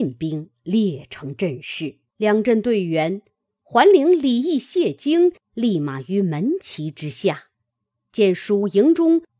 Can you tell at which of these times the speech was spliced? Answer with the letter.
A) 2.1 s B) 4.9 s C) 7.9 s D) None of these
A